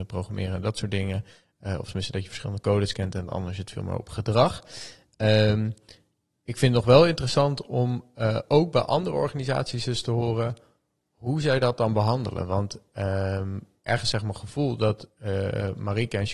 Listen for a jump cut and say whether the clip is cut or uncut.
uncut